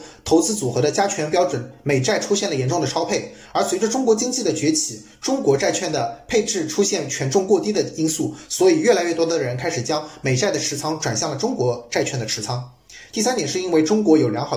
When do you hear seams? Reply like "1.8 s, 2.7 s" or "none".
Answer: 13.1 s